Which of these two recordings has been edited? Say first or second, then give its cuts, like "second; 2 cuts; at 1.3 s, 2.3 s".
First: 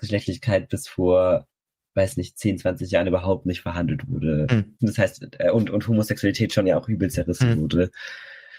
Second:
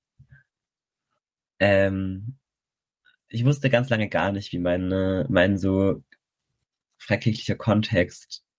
first; 1 cut; at 4.8 s